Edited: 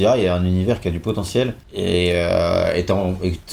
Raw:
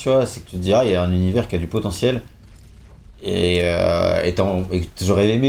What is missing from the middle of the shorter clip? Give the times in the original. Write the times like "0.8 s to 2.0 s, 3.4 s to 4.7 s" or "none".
2.3 s to 3.1 s